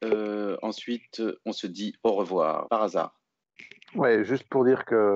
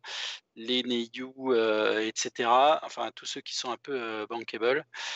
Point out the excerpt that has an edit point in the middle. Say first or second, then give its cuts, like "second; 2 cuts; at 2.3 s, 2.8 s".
first; 1 cut; at 2.7 s